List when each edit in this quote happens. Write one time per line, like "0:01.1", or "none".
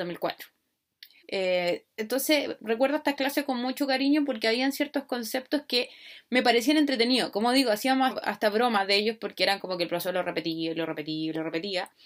0:01.2
0:08.1